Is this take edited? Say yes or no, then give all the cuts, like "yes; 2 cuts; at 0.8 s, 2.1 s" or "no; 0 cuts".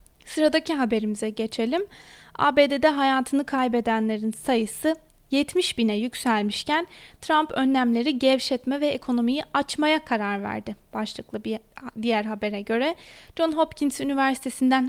no; 0 cuts